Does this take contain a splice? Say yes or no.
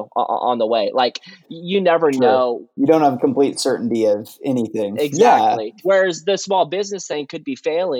no